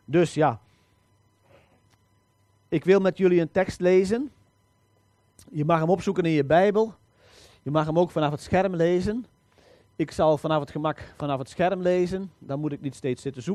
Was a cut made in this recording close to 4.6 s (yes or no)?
no